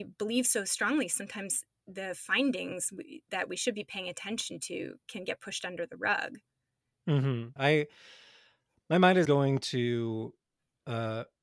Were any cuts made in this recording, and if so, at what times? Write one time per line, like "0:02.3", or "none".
0:07.6
0:09.2